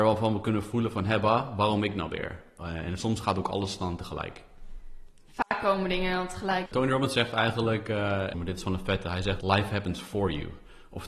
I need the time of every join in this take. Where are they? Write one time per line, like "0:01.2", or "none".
0:06.7
0:08.3
0:09.4